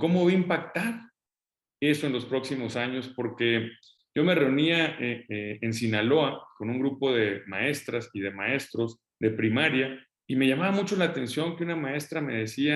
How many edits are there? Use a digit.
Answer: 1